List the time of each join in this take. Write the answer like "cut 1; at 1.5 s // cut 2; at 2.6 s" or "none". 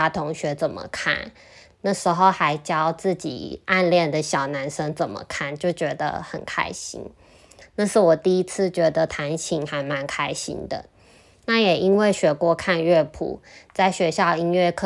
cut 1; at 7.6 s